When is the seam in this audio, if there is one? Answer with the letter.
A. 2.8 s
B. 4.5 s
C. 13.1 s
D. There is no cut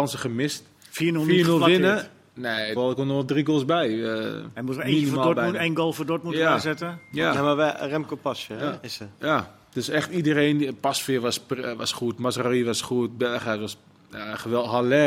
A